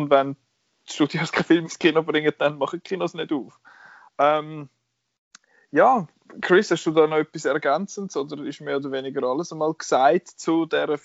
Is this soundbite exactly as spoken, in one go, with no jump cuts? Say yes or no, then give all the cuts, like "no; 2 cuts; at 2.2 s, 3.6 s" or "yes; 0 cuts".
no; 1 cut; at 4.1 s